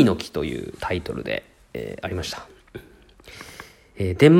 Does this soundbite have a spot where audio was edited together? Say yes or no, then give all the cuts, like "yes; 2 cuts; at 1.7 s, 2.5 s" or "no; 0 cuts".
no; 0 cuts